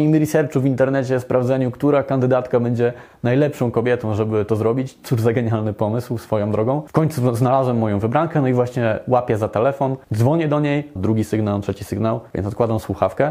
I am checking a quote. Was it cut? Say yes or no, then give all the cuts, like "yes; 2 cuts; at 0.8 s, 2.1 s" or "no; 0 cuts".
yes; 2 cuts; at 11.0 s, 12.3 s